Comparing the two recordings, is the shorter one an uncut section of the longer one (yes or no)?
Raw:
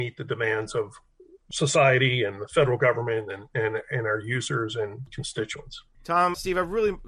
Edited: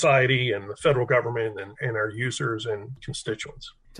no